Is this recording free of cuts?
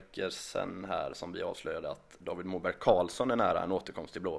yes; 0 cuts

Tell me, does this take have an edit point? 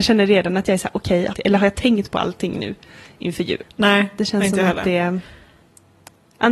yes; 2 cuts; at 1.3 s, 3.6 s

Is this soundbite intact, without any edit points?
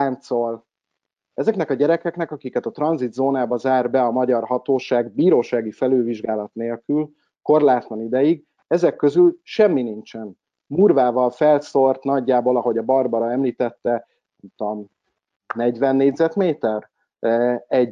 yes; 0 cuts

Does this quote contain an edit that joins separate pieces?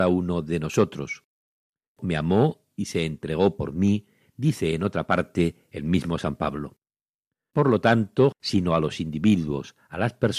yes; 1 cut; at 8.3 s

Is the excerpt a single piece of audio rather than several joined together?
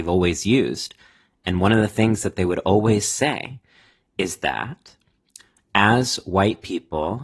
yes; 0 cuts

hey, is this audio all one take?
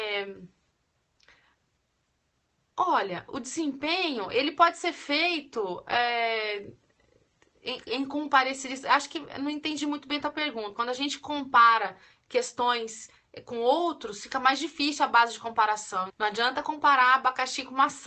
no; 2 cuts; at 10.7 s, 16.1 s

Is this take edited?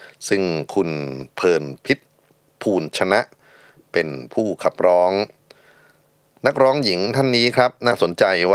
no; 0 cuts

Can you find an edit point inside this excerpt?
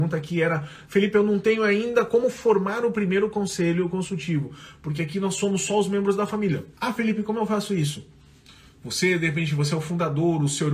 yes; 1 cut; at 6.7 s

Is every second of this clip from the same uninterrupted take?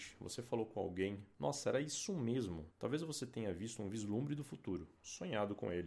no; 2 cuts; at 1.3 s, 2.7 s

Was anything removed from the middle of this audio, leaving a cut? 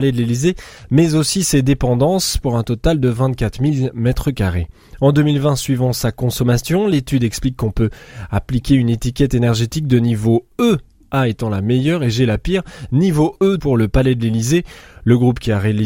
yes; 1 cut; at 13.6 s

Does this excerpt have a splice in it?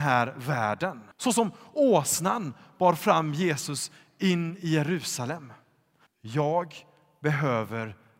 yes; 2 cuts; at 1.1 s, 6.1 s

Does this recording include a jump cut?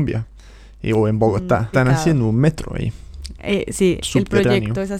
yes; 1 cut; at 1.7 s

